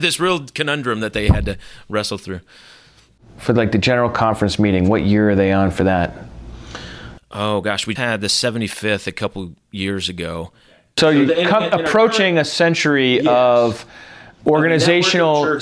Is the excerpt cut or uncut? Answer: cut